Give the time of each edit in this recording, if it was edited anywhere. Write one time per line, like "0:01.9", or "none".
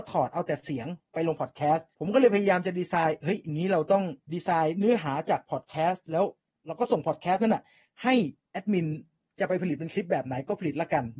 0:01.9
0:04.2